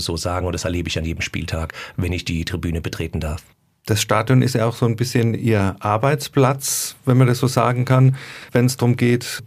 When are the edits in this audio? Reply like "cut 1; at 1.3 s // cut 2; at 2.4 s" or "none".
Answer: none